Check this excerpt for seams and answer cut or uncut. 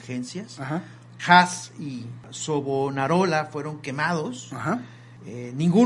cut